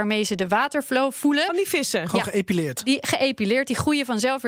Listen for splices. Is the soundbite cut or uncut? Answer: uncut